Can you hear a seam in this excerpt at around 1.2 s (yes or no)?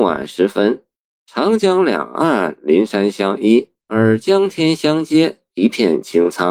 no